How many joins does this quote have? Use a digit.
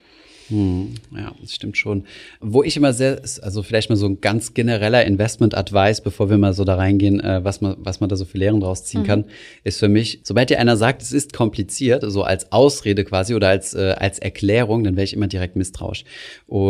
0